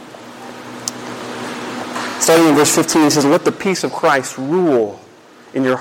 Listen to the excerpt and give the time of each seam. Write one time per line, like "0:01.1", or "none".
none